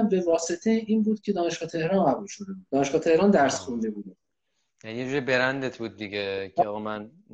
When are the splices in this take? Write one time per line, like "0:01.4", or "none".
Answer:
0:02.7